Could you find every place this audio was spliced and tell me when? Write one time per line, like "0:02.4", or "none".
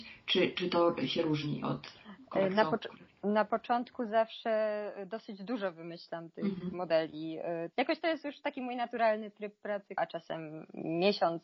0:07.7
0:10.0